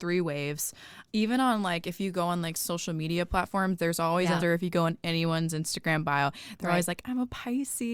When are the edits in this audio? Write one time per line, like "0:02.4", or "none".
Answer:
0:01.1
0:04.4